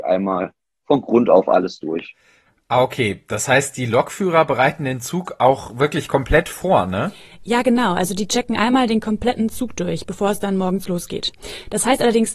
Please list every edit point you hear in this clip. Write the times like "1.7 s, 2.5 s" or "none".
none